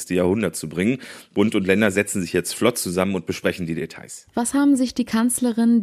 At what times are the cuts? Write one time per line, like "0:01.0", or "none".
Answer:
0:04.3